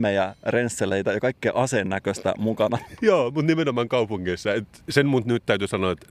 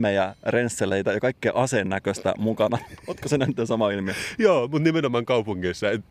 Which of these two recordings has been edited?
first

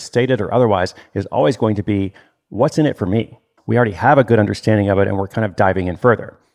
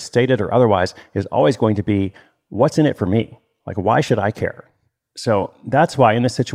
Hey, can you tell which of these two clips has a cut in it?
first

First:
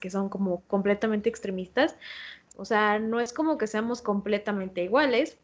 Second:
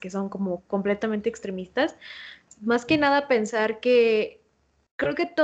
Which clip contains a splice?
first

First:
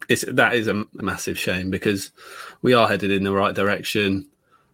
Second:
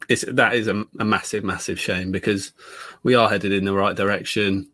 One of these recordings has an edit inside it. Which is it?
first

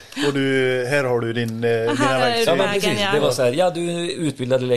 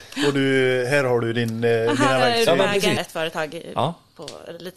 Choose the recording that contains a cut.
second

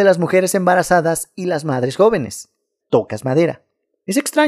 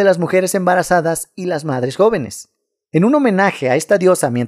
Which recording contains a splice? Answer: first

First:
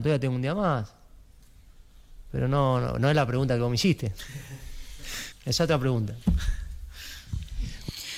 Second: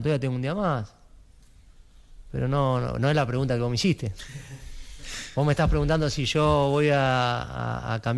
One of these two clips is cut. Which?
first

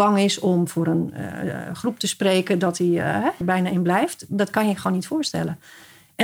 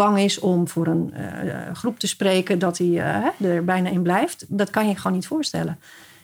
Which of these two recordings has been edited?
first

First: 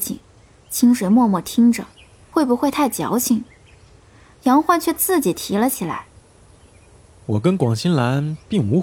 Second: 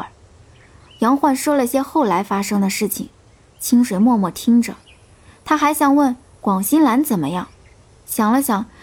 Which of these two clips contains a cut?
first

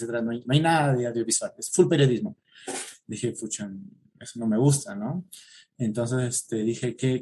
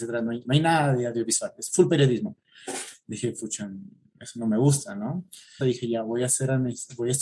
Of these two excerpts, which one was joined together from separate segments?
second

